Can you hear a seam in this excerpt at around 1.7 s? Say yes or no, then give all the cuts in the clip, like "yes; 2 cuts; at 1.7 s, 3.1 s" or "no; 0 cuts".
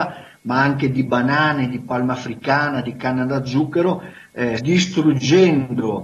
no; 1 cut; at 4.6 s